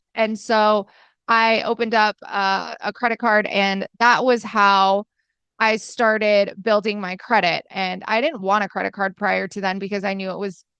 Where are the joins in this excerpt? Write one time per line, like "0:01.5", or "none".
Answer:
0:07.7